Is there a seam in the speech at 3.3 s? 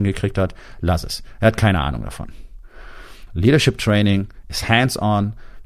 yes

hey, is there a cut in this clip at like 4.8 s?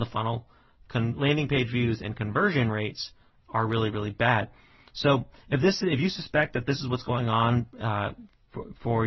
no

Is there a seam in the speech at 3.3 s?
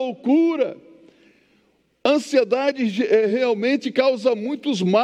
no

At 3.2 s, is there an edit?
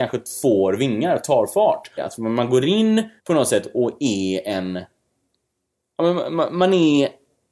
yes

